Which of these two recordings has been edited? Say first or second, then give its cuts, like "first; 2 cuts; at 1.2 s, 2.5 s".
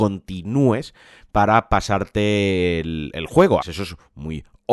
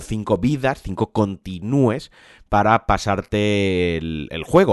first; 1 cut; at 3.6 s